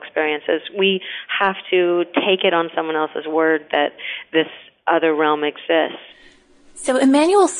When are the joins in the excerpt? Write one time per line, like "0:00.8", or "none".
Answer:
none